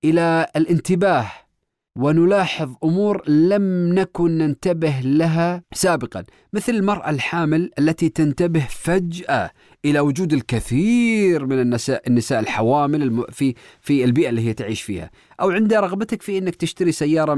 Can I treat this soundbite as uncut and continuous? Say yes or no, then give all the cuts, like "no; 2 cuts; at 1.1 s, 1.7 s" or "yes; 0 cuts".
yes; 0 cuts